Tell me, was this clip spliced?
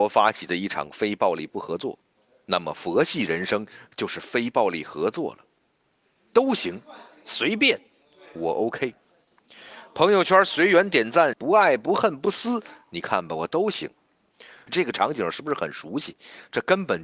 yes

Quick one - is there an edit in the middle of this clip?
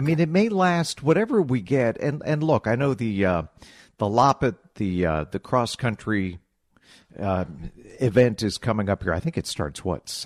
no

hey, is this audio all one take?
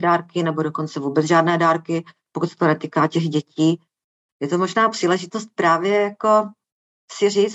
no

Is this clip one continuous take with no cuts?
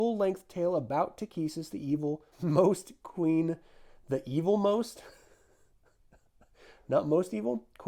no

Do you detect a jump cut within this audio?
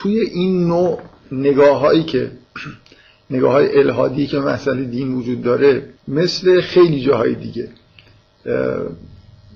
yes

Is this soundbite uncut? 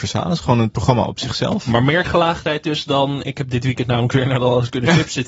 yes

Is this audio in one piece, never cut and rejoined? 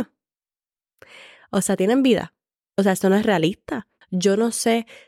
no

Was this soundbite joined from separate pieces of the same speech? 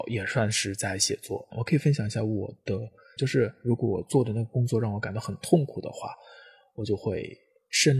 yes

